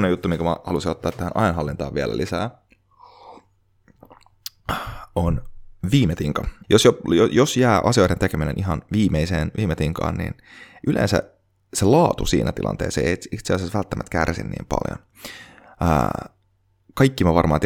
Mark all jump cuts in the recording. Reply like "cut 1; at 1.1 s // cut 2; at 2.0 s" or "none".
cut 1; at 6.6 s